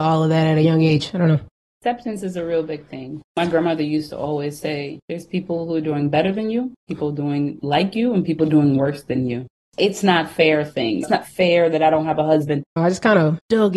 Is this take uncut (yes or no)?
no